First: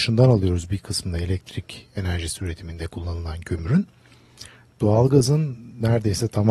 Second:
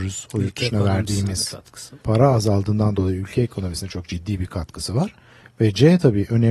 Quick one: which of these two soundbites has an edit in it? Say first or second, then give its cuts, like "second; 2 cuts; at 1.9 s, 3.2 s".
second; 1 cut; at 2.0 s